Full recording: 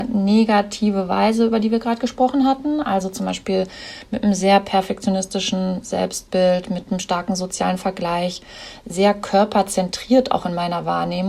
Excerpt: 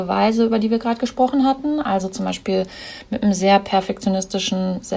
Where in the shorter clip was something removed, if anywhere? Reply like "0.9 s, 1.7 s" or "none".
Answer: none